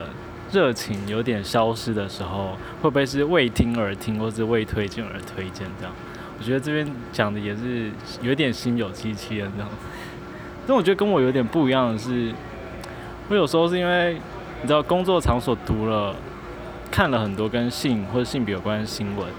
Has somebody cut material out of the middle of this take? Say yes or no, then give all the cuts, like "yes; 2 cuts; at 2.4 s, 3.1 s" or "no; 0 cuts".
no; 0 cuts